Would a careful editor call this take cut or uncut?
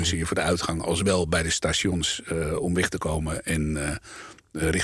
uncut